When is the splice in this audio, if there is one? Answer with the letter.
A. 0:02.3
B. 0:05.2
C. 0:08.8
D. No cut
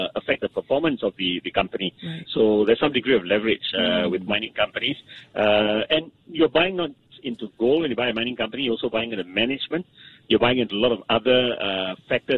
A